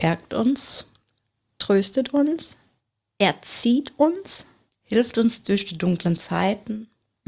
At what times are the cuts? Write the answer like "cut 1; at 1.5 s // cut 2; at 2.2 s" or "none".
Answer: cut 1; at 4.7 s

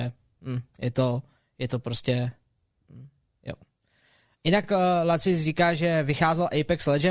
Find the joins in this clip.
none

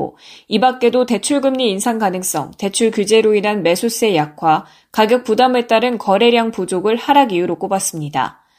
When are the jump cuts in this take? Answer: none

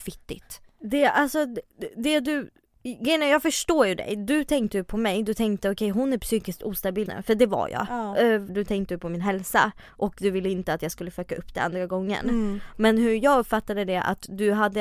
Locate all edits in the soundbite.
cut 1; at 7.1 s // cut 2; at 8.5 s

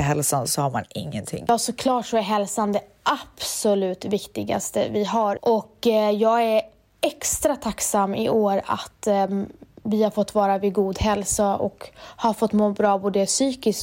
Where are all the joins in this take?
cut 1; at 5.4 s

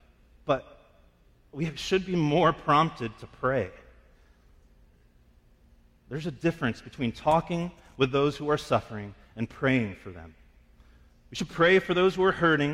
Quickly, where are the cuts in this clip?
none

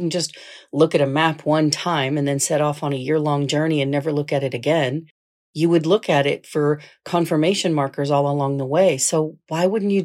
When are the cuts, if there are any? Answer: none

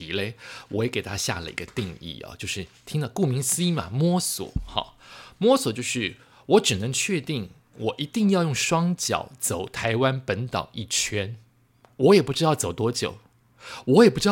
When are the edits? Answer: cut 1; at 11.8 s

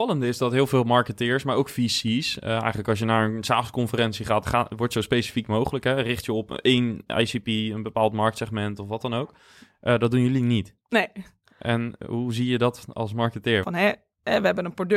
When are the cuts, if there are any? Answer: cut 1; at 4.4 s // cut 2; at 13.6 s

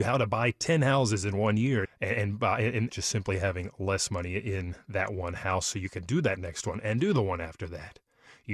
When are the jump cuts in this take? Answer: cut 1; at 1.8 s // cut 2; at 2.9 s

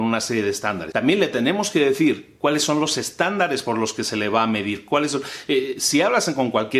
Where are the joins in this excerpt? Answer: cut 1; at 0.9 s

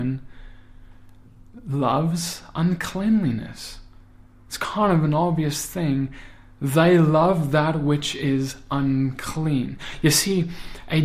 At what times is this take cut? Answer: none

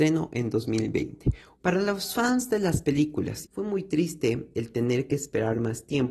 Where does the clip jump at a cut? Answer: cut 1; at 1.6 s // cut 2; at 3.4 s

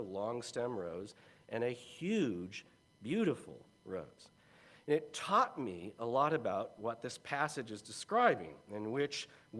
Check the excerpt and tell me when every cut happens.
none

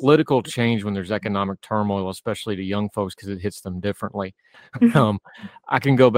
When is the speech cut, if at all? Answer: cut 1; at 4.5 s

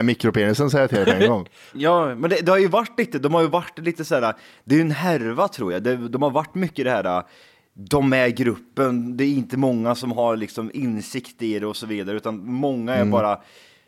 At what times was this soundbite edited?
none

